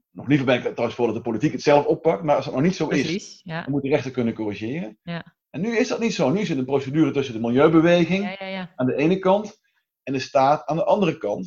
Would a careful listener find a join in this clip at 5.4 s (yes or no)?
yes